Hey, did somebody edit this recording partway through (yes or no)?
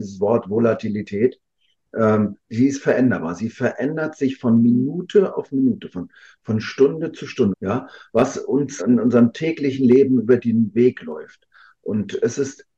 yes